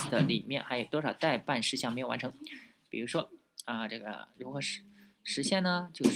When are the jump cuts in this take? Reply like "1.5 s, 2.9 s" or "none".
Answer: none